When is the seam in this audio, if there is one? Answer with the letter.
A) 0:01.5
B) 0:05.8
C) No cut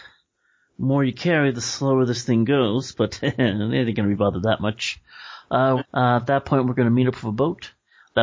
B